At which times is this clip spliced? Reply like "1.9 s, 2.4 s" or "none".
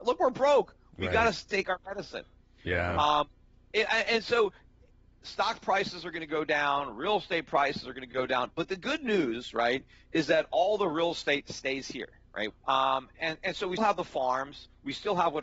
12.5 s, 13.8 s